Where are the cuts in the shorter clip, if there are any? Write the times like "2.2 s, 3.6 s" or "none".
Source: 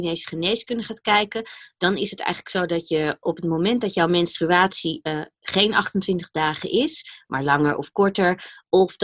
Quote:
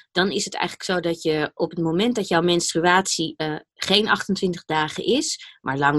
none